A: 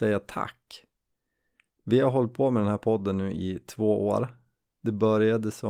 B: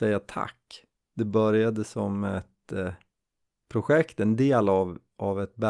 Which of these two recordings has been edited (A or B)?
B